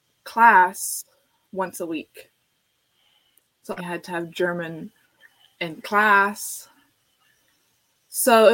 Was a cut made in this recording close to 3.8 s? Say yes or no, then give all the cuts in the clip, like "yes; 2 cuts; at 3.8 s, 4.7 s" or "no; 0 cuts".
yes; 1 cut; at 3.8 s